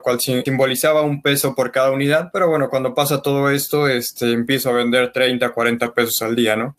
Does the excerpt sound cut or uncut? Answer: uncut